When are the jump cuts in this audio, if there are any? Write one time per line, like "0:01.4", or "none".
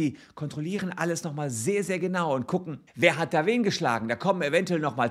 0:02.9